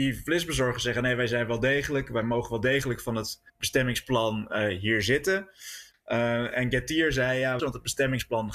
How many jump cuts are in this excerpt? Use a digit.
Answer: 2